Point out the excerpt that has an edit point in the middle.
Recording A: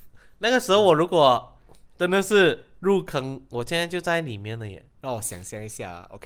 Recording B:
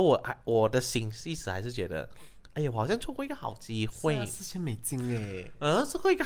A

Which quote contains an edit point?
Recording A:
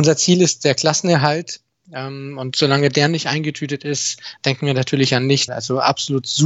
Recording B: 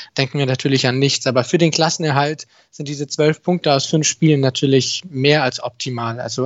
A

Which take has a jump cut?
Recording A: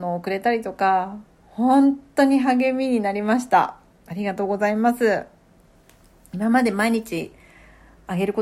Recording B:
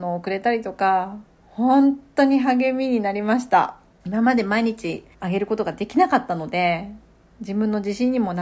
B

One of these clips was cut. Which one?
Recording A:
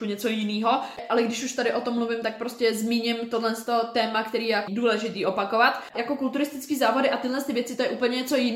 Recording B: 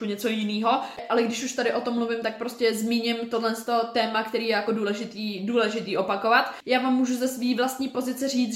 A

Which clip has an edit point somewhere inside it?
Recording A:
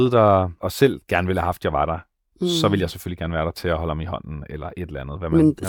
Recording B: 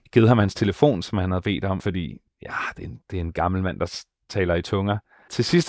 B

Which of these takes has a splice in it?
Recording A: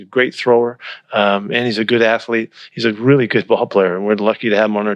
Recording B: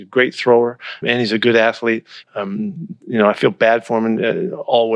B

